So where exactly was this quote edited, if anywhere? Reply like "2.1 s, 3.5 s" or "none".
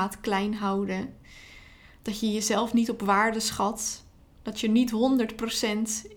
4.4 s